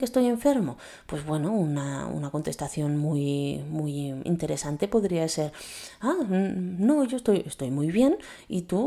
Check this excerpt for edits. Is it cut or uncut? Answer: uncut